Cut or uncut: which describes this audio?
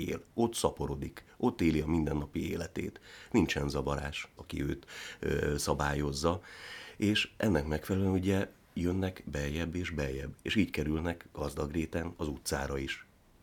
cut